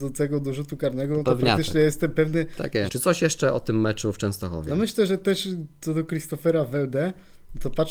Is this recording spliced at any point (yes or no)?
yes